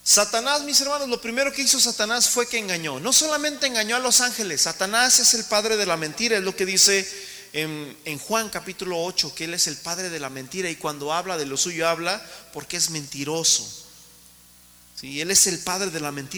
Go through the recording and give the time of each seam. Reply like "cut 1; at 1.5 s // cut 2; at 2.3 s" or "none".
none